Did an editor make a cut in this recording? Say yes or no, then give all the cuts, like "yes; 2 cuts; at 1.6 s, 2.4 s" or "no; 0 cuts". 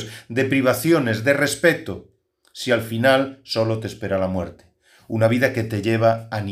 no; 0 cuts